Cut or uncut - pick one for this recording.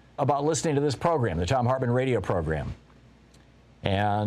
uncut